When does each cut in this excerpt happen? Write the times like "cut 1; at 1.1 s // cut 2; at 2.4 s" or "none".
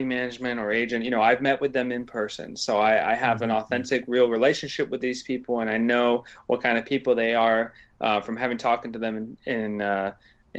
none